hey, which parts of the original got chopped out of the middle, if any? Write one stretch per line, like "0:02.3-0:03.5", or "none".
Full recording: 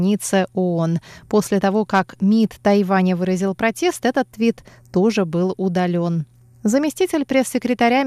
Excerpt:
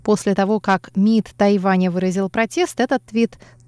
none